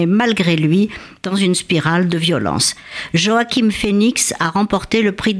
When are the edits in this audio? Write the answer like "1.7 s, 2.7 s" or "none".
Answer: none